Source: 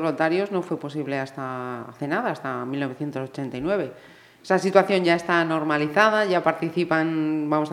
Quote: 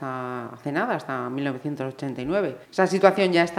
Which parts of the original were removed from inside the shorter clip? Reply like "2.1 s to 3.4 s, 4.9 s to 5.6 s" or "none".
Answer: 4.0 s to 4.3 s